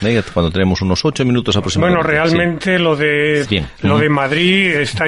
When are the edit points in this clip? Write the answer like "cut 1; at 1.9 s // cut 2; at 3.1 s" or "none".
cut 1; at 3.4 s